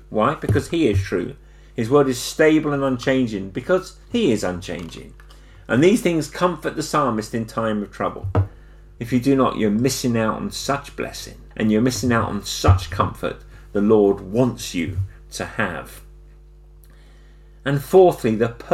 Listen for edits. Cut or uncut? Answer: cut